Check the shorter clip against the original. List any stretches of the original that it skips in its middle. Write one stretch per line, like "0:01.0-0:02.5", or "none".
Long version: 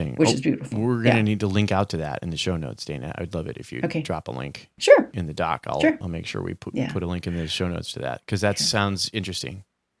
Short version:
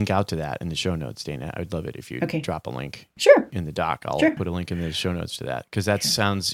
0:06.0-0:06.9